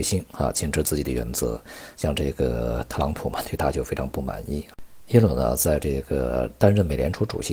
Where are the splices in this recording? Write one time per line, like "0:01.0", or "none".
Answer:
none